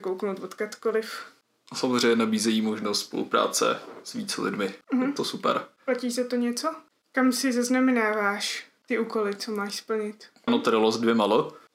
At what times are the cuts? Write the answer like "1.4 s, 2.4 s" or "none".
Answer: 4.8 s, 7.0 s, 10.5 s

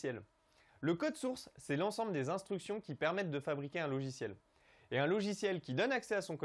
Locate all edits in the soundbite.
none

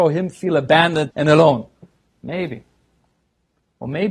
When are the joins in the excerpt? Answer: 1.1 s

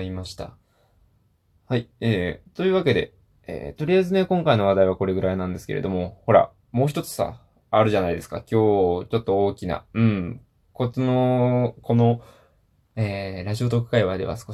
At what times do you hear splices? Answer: none

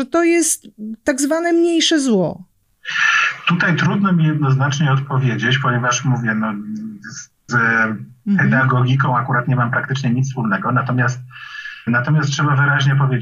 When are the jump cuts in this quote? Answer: 7.5 s, 11.9 s

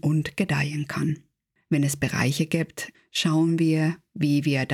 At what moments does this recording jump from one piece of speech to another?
1.6 s, 2.9 s

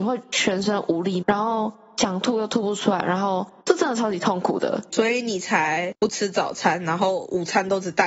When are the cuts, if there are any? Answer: 1.2 s, 4.9 s

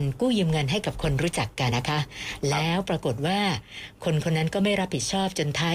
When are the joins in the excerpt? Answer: 1.7 s

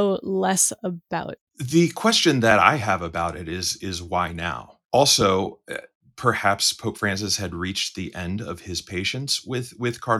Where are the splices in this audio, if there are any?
1.4 s, 4.8 s

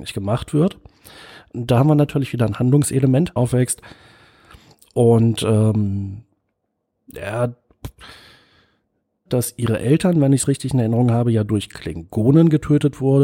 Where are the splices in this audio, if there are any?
3.4 s, 9.3 s

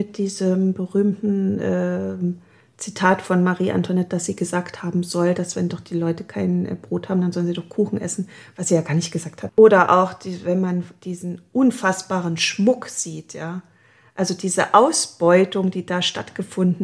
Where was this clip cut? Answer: 9.5 s

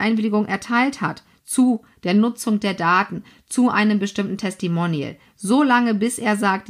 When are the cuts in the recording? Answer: none

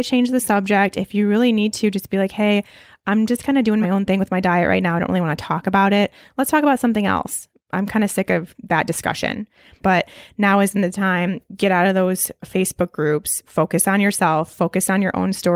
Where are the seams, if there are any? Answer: 9.8 s

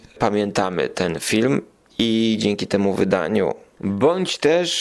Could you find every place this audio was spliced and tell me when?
none

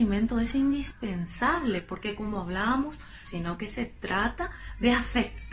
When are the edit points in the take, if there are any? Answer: 3.2 s

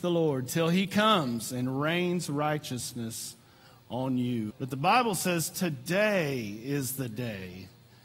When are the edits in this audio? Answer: 4.5 s

